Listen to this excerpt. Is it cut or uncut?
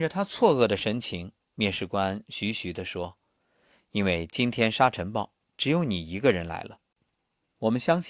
uncut